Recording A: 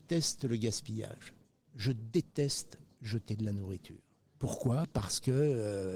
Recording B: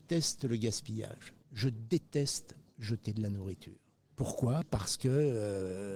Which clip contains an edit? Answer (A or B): B